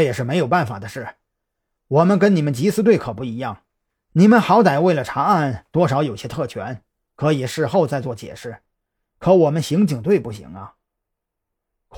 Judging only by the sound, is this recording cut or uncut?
uncut